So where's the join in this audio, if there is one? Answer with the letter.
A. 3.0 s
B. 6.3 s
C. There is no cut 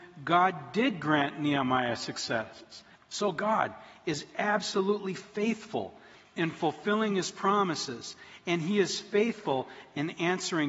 A